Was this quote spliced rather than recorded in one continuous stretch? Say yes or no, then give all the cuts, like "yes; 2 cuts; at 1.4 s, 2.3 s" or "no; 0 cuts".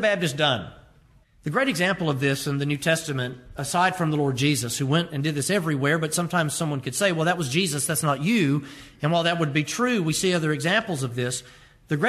yes; 1 cut; at 1.2 s